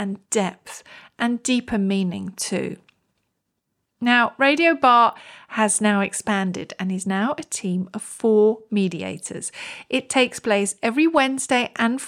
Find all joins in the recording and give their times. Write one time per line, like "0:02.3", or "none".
none